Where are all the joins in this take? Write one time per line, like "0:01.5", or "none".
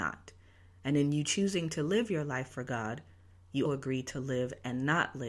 0:03.6